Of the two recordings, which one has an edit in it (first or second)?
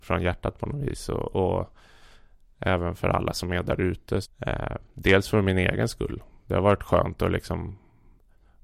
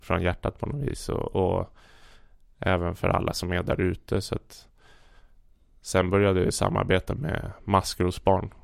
first